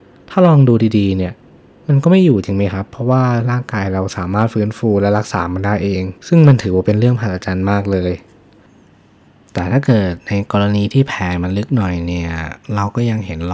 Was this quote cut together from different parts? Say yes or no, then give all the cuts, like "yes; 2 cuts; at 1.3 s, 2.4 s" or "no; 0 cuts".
yes; 1 cut; at 6.2 s